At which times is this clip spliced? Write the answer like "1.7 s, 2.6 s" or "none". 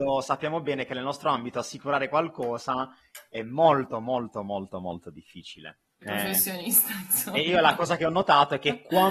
6.0 s

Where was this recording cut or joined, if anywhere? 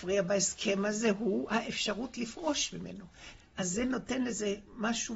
3.4 s

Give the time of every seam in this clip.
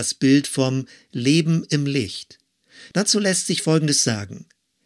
2.9 s

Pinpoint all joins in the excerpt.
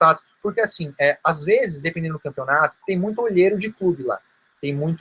2.7 s

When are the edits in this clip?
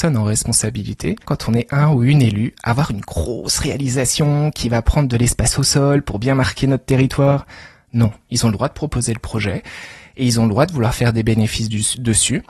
1.2 s, 8.3 s

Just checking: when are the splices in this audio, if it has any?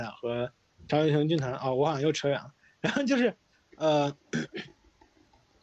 none

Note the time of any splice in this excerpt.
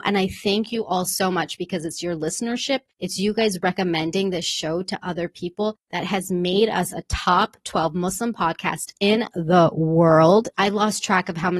10.5 s

